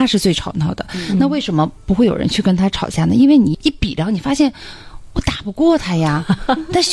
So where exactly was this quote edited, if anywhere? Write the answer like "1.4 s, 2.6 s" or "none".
3.5 s